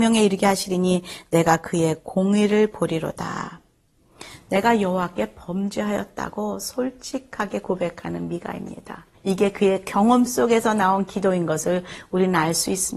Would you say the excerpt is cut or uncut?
cut